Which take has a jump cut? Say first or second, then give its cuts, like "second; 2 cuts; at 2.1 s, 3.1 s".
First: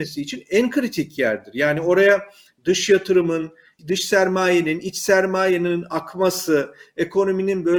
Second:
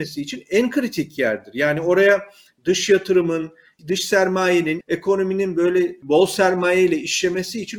second; 1 cut; at 4.8 s